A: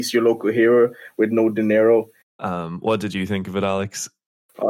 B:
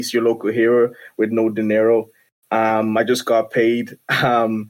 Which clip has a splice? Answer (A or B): A